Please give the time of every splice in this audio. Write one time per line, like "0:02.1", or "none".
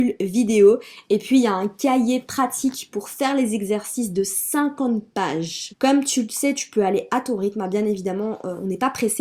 0:05.7

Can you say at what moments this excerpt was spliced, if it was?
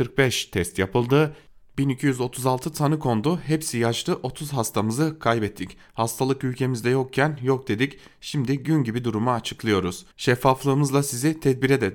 0:10.1

